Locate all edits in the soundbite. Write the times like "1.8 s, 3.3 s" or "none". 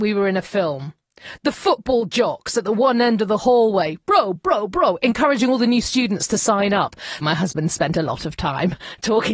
4.4 s, 7.2 s